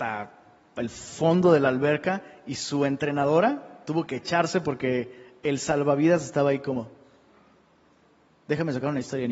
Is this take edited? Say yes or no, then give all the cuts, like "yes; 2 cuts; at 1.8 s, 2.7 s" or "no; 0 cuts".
no; 0 cuts